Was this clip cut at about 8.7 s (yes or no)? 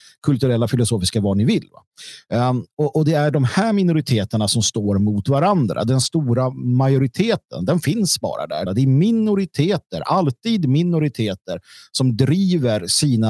yes